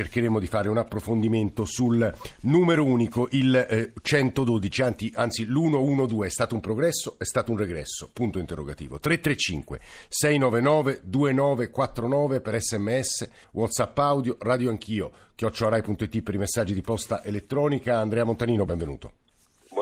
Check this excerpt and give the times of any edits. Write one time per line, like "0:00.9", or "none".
0:13.4
0:18.7